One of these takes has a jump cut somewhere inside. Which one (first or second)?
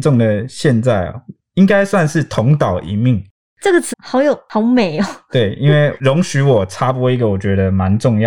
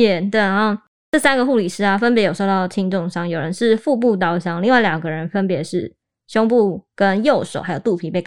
first